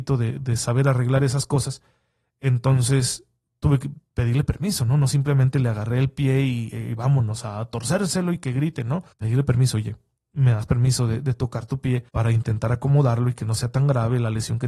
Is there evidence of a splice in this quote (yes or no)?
yes